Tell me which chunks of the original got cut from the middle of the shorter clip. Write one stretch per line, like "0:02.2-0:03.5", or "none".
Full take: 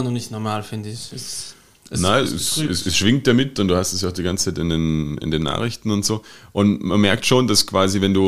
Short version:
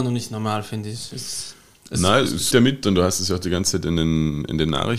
0:02.5-0:03.2